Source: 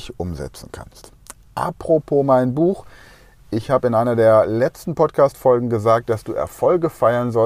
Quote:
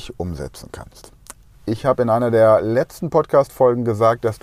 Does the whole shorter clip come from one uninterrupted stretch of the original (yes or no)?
no